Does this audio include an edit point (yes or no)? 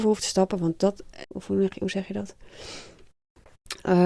yes